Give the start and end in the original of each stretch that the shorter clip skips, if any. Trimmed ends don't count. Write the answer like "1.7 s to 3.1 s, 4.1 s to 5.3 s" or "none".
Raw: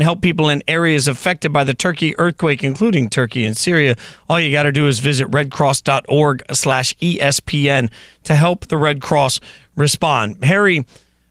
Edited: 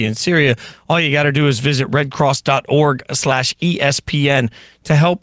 none